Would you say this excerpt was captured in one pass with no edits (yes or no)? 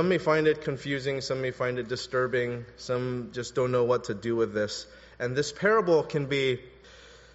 yes